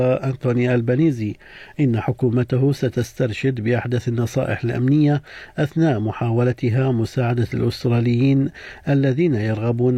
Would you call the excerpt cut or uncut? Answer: uncut